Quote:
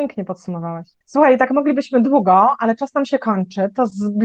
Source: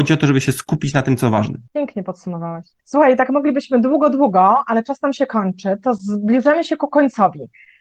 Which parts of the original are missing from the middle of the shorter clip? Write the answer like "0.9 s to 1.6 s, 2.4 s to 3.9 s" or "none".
3.8 s to 4.1 s